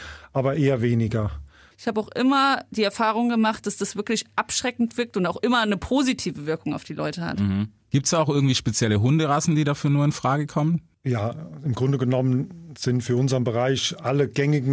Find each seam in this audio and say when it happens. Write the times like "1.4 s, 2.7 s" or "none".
1.7 s